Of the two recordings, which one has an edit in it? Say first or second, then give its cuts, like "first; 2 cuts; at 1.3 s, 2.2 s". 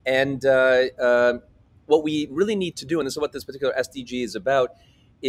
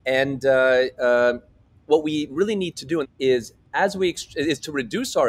second; 1 cut; at 3.0 s